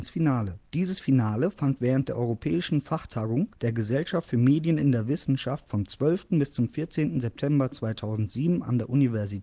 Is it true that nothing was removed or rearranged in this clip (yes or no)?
yes